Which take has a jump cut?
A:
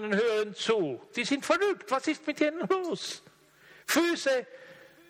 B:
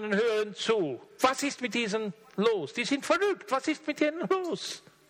A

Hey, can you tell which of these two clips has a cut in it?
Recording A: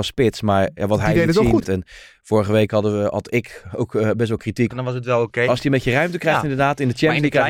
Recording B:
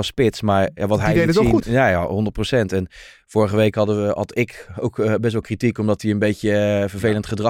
A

